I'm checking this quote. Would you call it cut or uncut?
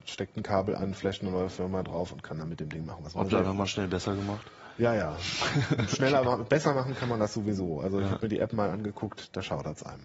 uncut